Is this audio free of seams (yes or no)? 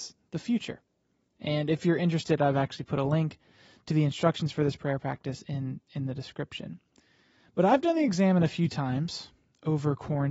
yes